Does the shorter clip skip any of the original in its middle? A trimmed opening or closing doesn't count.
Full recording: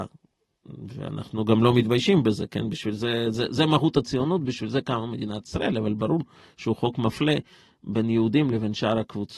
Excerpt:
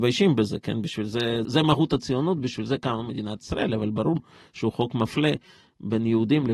yes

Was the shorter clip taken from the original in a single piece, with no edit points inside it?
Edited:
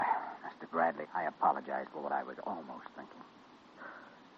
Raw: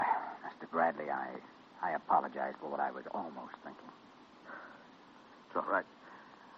no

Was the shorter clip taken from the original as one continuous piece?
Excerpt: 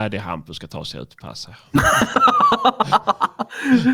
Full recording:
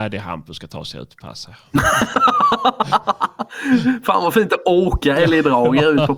yes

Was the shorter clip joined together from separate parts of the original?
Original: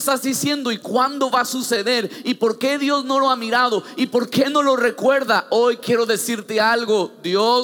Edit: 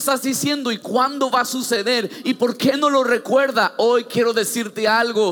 yes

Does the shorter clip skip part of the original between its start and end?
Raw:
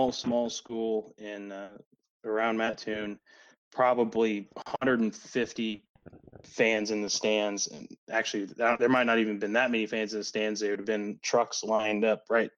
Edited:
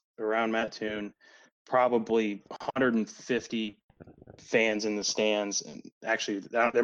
no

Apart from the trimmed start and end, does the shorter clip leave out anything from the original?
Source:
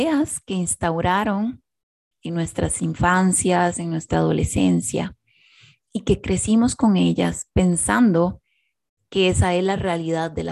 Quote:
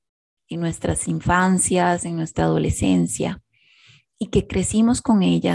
no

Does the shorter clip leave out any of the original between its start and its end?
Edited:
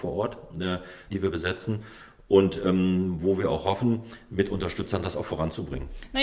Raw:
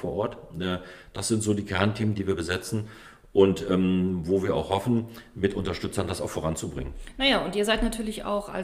yes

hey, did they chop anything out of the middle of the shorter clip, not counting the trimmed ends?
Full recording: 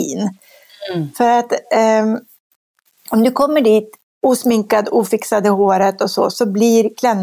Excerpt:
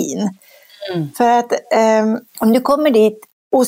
yes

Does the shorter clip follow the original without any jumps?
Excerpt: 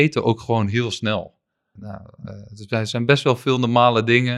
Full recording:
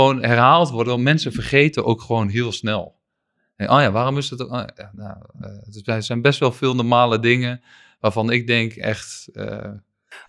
no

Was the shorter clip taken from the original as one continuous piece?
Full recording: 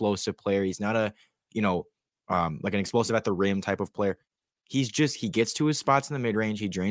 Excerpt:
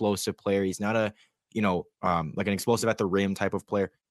no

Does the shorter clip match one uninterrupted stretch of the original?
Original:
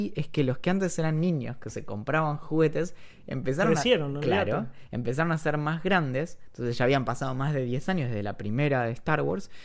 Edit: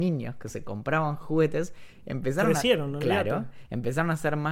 yes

